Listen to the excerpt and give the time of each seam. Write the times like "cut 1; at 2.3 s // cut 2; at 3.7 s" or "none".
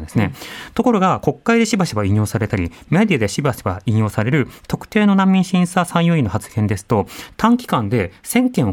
none